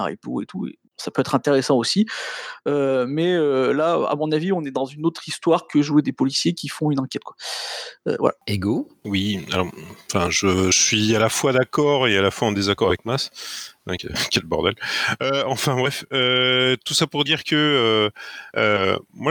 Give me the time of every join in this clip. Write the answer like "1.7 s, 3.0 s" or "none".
none